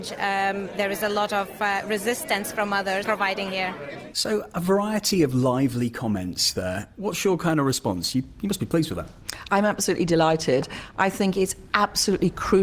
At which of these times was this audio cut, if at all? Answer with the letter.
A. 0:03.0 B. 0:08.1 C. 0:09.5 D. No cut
A